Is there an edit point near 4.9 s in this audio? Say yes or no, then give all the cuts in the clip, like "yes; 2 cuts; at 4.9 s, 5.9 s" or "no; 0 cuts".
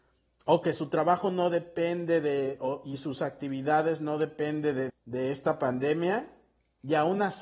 yes; 1 cut; at 4.9 s